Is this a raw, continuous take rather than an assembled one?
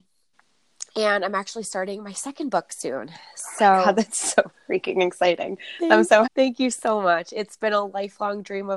no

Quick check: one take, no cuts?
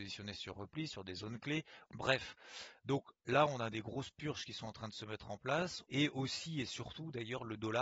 no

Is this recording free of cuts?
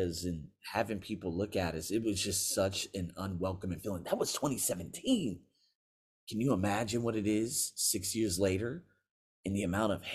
yes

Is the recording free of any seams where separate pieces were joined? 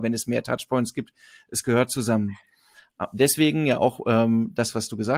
yes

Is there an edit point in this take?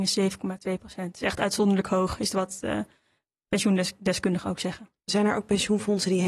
yes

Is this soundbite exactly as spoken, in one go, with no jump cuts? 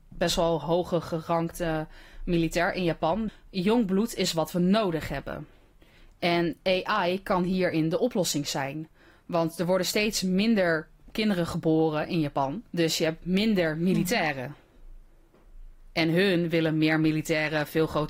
no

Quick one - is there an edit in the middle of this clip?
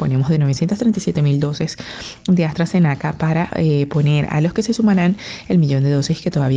no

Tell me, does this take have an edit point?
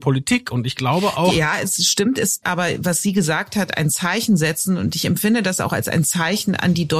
yes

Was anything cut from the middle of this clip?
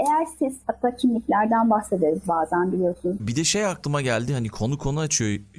yes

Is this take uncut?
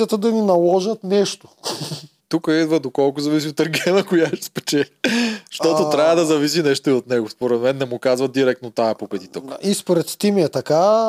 no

